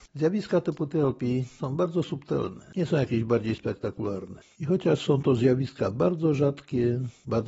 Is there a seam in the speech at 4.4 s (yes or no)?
yes